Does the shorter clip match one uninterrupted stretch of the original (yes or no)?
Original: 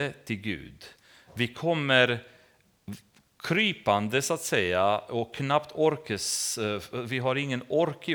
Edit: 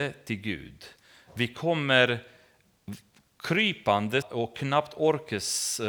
no